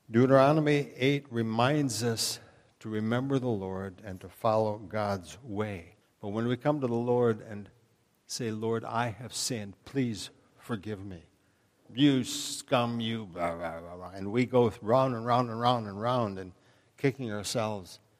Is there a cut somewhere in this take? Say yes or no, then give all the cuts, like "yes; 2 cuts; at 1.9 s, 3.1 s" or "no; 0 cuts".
yes; 2 cuts; at 6.0 s, 11.8 s